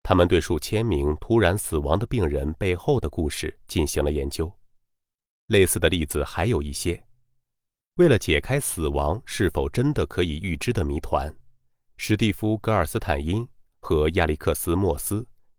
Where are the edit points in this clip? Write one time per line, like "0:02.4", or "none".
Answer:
0:05.3
0:11.8